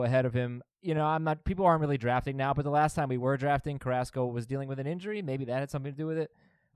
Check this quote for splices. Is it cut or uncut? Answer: uncut